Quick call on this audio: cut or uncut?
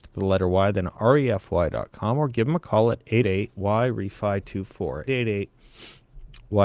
cut